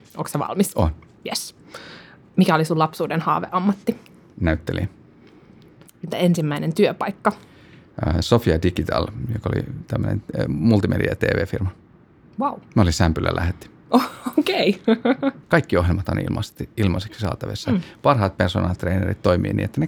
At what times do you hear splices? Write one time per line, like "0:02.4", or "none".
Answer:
0:15.4